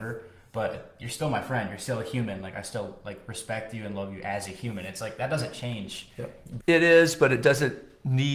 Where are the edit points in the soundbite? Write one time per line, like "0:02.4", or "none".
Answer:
0:06.6

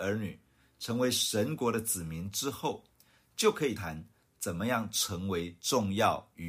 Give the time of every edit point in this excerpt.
0:03.8

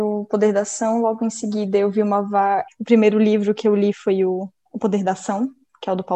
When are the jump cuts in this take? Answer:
0:02.7
0:04.7

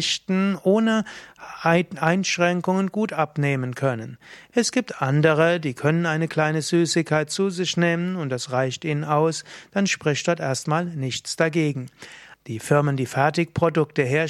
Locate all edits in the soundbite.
0:04.5
0:12.3

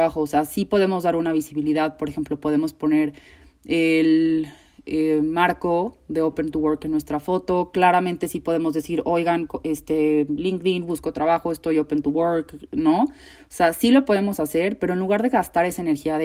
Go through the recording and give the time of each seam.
none

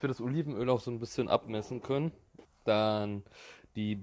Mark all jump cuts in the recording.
0:02.4

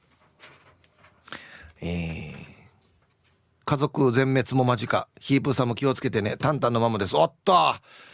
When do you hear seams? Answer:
0:03.6

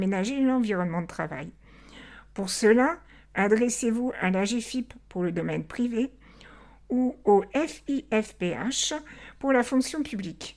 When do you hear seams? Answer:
none

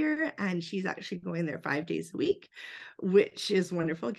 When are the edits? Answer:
none

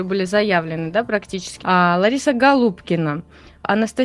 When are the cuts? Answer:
0:01.6

